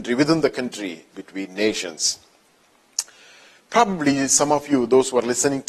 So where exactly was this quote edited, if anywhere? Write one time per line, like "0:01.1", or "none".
0:01.1
0:03.6